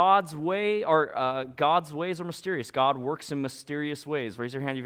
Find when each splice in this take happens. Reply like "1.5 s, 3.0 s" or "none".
none

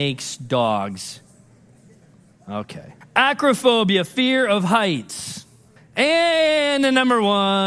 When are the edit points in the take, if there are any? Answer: 3.0 s, 5.8 s

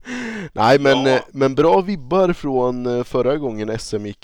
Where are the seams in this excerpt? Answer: none

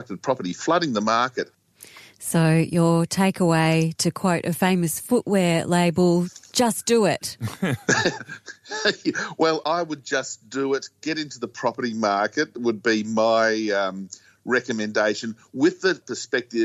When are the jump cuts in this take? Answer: none

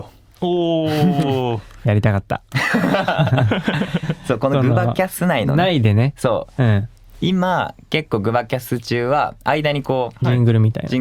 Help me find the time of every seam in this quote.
none

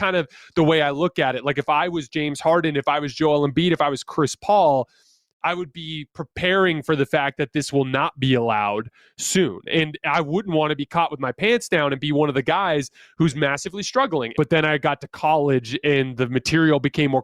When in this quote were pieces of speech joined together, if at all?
14.3 s

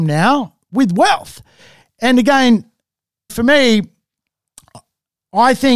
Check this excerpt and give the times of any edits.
3.3 s

